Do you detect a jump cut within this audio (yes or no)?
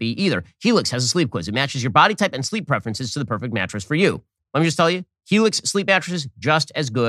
yes